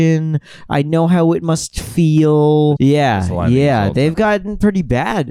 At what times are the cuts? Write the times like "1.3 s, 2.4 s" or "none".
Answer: 2.8 s